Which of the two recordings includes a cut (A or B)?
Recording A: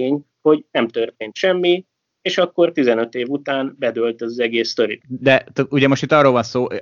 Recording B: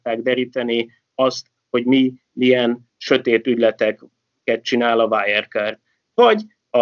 A